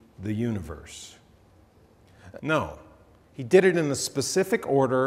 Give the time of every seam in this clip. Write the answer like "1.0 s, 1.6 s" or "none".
2.4 s